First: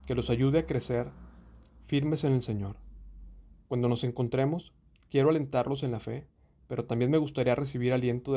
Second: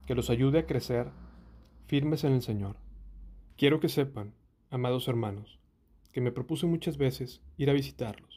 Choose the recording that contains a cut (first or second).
second